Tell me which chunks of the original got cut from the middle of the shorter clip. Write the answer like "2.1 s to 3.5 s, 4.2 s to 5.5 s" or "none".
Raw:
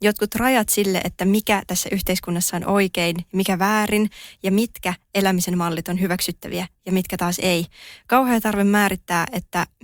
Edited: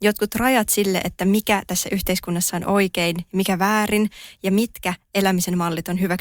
none